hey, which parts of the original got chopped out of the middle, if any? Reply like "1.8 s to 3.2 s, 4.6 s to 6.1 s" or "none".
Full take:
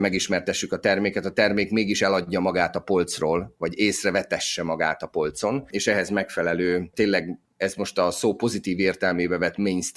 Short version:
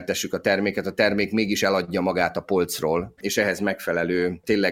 3.6 s to 5.7 s

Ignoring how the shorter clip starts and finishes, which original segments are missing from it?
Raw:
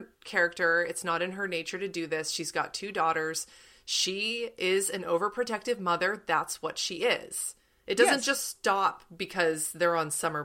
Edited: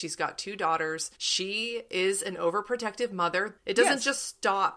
3.5 s to 3.8 s, 6.2 s to 7.8 s

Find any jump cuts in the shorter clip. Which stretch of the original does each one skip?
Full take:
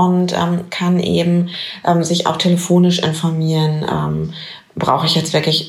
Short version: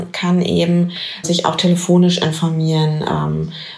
1.8 s to 2.0 s

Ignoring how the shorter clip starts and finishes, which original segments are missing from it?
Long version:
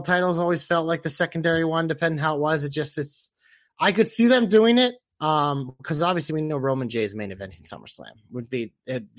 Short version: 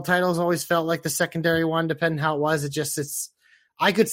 none

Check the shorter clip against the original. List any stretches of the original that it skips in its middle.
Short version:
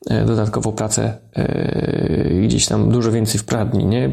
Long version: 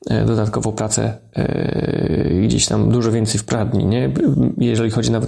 none

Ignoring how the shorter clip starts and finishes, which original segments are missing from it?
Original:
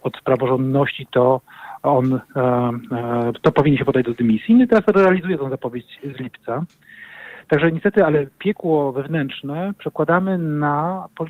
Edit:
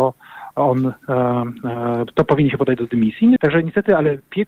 4.6 s to 7.4 s

